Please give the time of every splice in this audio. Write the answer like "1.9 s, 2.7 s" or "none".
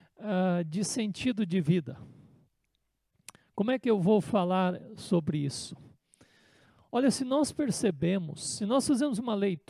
none